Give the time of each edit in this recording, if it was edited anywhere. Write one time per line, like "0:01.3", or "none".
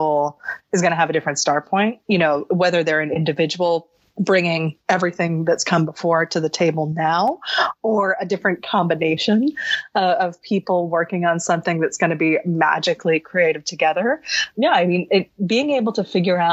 0:02.0